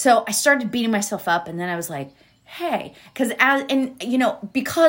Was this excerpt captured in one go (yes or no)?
yes